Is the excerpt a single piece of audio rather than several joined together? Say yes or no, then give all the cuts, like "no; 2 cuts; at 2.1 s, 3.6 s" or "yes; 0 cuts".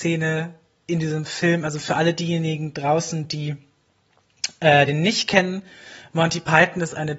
yes; 0 cuts